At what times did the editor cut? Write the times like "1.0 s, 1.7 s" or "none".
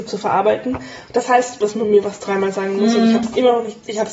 1.6 s